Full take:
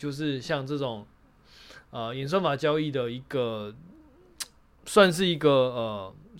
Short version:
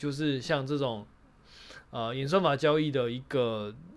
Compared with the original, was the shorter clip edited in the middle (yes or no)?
no